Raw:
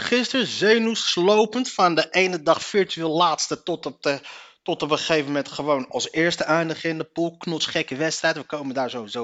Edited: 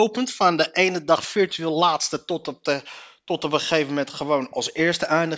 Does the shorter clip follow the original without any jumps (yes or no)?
yes